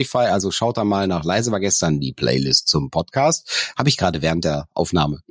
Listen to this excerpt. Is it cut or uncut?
uncut